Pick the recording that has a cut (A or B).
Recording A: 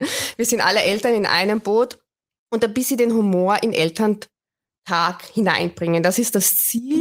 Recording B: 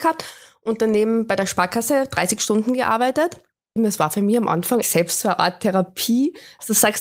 B